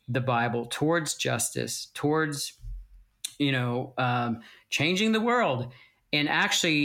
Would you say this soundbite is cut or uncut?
uncut